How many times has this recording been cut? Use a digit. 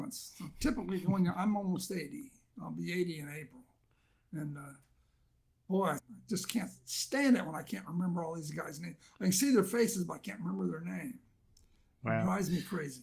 1